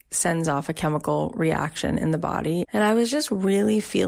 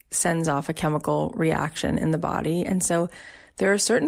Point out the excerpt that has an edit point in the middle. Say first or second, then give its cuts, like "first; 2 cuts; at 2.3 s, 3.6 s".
first; 1 cut; at 2.6 s